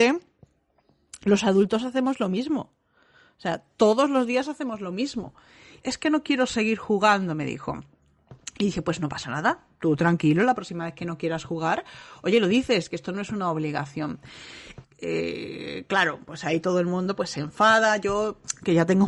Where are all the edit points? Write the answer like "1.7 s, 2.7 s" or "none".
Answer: 5.8 s, 12.9 s, 14.8 s